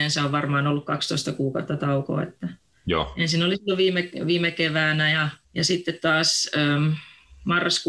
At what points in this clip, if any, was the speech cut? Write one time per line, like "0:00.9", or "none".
0:05.4